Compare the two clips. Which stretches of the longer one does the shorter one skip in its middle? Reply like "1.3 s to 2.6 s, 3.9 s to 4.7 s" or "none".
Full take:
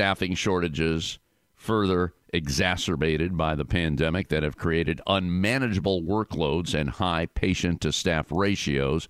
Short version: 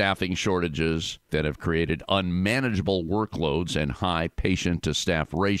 1.3 s to 4.3 s